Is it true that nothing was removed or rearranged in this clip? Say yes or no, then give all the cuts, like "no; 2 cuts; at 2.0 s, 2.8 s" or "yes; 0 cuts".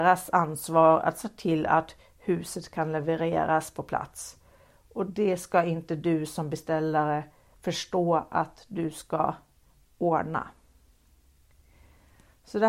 yes; 0 cuts